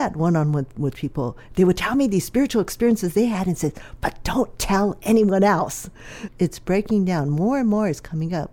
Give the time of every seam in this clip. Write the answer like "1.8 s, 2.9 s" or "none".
1.5 s, 6.3 s